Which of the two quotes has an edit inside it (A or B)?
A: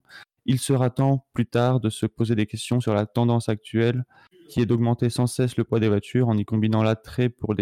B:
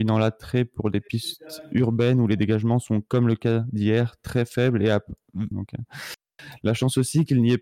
B